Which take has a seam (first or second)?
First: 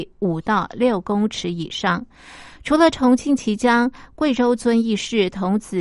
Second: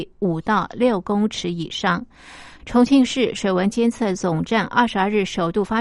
second